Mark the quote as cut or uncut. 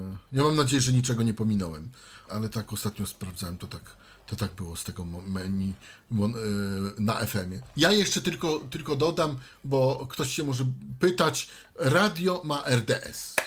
cut